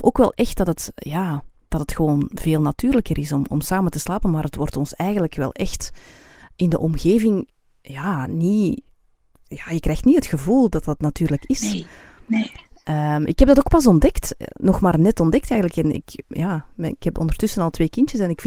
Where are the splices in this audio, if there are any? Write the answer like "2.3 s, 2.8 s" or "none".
none

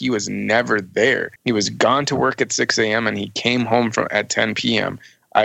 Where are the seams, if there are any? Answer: 1.4 s

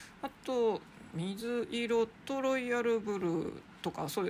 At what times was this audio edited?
1.1 s

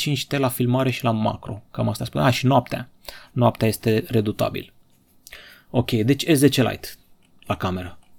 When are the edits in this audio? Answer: none

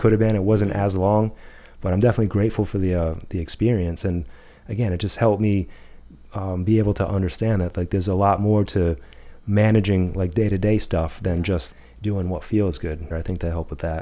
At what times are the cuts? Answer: 13.1 s

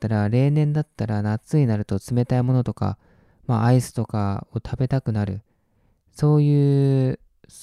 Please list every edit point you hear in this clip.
none

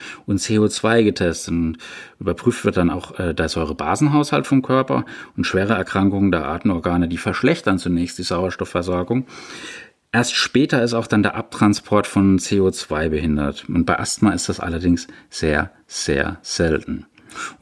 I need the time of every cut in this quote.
none

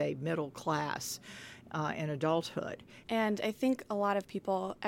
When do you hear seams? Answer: 3.0 s

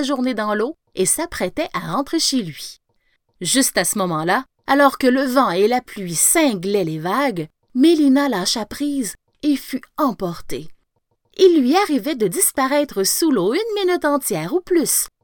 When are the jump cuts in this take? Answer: 11.2 s

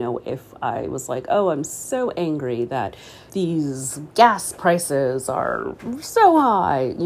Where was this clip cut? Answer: 3.3 s

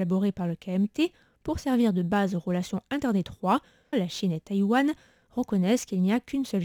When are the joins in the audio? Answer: 3.9 s

